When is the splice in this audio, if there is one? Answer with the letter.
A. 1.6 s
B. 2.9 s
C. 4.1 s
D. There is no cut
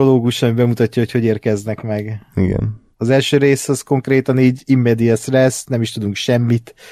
B